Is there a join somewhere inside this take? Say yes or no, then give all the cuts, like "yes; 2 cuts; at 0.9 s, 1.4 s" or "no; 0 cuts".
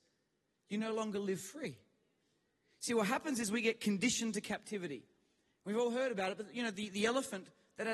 no; 0 cuts